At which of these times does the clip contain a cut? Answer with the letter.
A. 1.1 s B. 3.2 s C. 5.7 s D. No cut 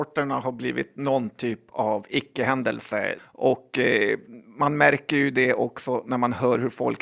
B